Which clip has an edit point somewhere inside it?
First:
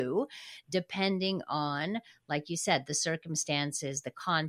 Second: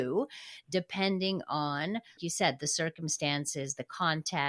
second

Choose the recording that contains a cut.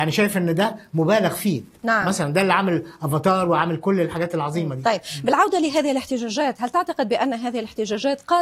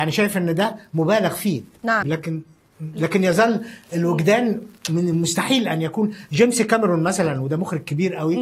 second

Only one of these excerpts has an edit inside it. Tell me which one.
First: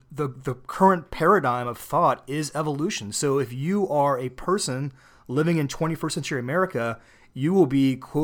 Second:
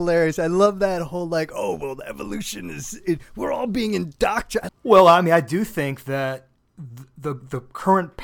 second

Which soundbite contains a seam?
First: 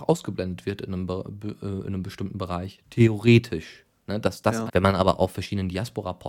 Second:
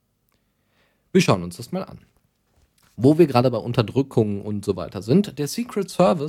first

